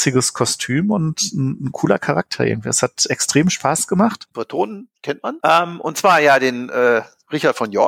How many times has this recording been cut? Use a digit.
1